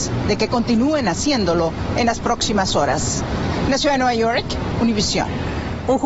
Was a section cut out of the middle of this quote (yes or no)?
yes